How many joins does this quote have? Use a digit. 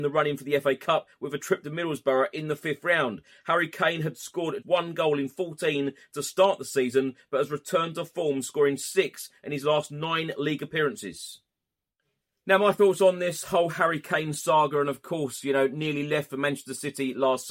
1